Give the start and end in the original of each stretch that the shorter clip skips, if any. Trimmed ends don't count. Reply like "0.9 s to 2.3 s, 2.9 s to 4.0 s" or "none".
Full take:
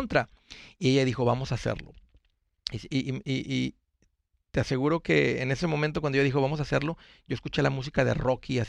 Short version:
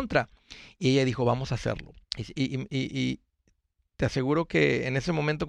2.0 s to 2.6 s